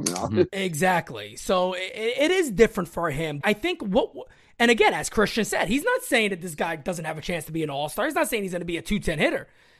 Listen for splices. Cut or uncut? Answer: cut